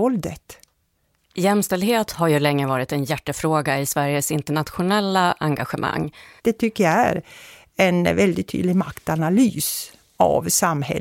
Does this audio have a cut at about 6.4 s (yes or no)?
yes